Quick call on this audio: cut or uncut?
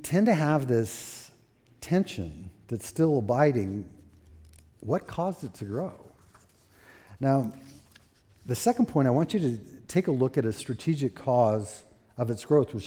uncut